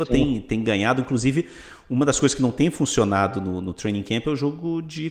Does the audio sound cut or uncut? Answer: uncut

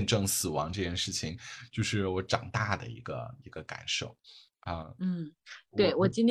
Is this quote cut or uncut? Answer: uncut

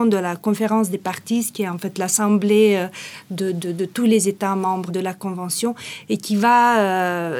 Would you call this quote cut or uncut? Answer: cut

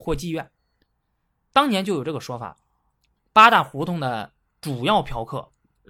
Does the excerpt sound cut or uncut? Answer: uncut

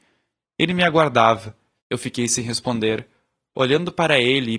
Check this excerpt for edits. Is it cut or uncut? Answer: cut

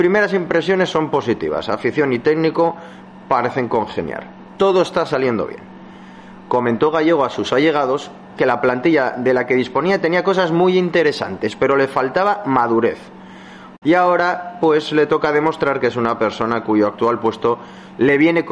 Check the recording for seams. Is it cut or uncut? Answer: cut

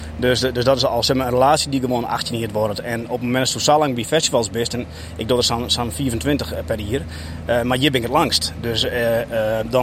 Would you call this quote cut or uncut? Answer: uncut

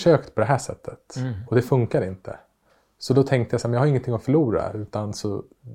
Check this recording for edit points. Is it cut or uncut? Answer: uncut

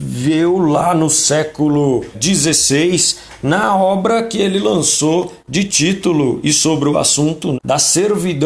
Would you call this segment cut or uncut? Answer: cut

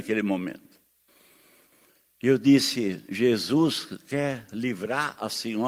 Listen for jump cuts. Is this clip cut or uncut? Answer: uncut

